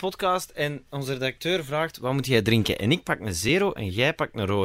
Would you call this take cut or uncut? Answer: uncut